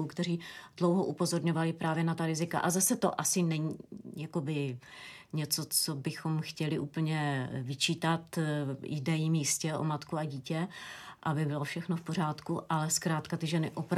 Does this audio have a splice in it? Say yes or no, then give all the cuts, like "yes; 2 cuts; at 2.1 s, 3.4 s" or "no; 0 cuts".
no; 0 cuts